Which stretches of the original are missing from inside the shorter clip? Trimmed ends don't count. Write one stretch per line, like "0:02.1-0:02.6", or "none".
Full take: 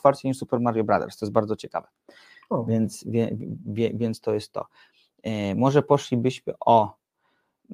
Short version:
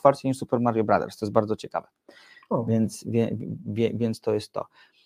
none